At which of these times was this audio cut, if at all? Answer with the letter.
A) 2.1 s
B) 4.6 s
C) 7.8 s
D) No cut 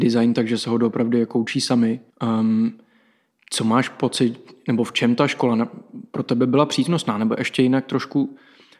A